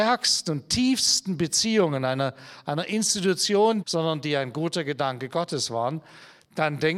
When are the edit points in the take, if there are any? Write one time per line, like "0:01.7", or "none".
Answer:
0:03.8